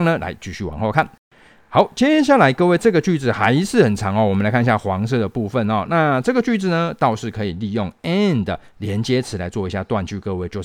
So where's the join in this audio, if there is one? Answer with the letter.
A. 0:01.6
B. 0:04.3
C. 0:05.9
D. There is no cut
D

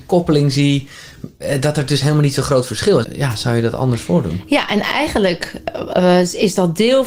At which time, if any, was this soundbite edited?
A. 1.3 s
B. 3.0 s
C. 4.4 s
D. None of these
B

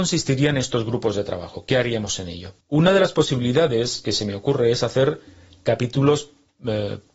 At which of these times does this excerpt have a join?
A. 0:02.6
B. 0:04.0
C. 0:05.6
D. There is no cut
A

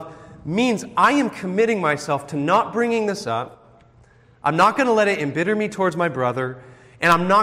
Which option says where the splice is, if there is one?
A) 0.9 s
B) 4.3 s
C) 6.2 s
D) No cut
D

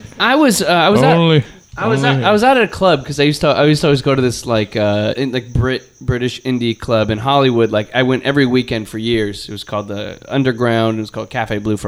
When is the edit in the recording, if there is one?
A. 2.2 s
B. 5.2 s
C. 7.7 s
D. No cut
B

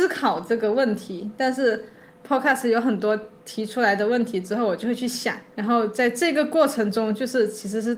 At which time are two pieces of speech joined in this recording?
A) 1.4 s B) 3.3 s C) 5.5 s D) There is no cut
D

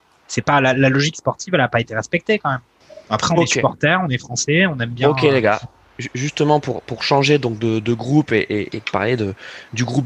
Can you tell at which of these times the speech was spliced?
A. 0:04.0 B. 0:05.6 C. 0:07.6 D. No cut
B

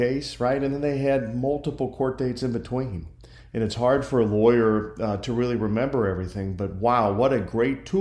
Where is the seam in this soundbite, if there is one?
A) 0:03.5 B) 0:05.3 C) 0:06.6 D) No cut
D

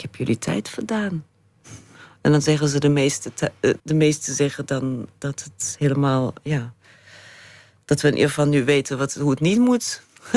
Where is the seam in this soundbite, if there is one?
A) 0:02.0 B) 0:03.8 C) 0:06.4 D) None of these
B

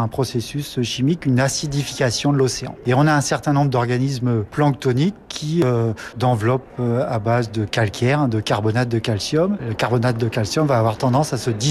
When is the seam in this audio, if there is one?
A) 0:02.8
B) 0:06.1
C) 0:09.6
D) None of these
B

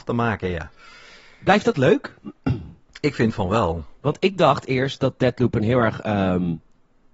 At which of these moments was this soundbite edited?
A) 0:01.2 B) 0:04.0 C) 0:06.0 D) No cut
B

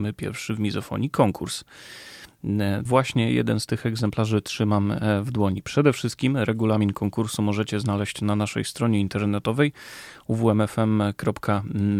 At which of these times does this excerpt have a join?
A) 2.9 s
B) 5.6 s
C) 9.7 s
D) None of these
A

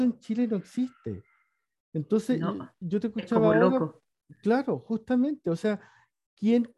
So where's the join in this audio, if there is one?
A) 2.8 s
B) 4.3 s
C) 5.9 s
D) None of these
A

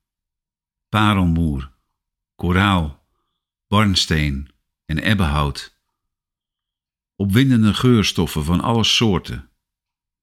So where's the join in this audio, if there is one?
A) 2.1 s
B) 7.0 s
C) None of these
C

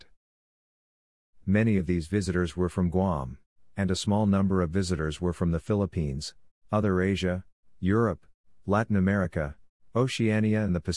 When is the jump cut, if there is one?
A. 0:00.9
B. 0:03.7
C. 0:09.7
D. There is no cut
D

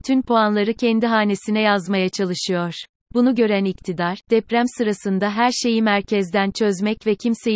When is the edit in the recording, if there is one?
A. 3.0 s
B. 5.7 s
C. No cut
A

